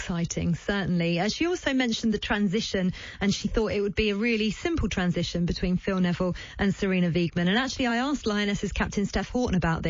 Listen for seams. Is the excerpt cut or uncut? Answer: uncut